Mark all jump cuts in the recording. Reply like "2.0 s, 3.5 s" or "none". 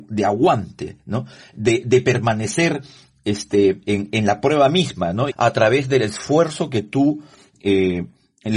5.3 s